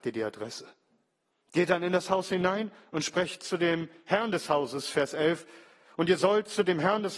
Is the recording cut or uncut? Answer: uncut